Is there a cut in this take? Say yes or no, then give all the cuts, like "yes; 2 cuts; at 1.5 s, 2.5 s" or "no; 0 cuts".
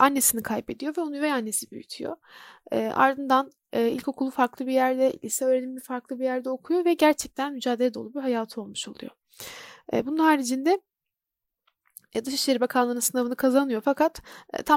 no; 0 cuts